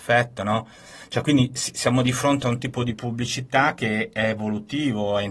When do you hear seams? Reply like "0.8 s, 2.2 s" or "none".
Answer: none

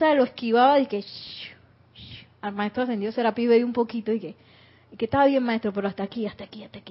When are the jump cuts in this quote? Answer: none

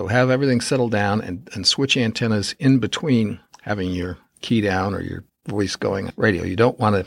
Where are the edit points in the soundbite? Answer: none

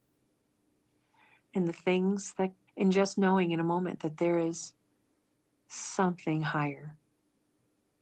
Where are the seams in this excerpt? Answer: 2.7 s

